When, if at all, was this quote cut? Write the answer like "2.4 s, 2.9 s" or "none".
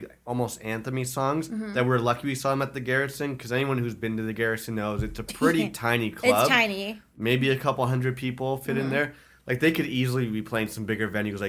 none